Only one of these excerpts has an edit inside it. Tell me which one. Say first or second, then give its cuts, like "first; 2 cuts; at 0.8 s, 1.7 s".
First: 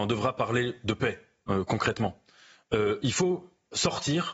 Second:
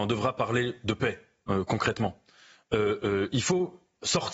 first; 1 cut; at 3.0 s